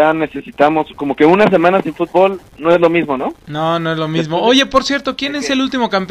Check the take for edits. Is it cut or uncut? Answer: uncut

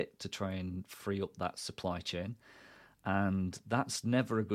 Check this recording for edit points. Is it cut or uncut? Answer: uncut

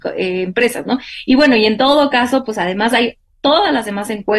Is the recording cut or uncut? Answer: uncut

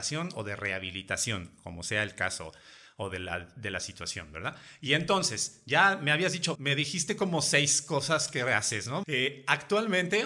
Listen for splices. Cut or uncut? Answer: cut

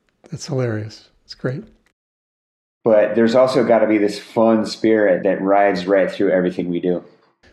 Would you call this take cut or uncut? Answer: cut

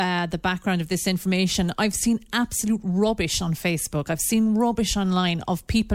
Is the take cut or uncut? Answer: uncut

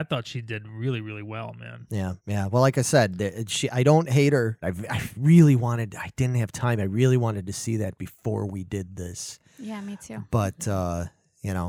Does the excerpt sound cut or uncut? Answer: cut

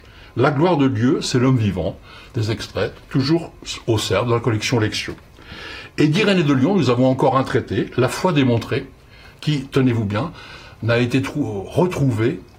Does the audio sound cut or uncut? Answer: uncut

